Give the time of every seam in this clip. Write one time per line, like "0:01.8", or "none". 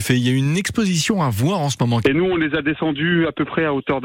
0:02.0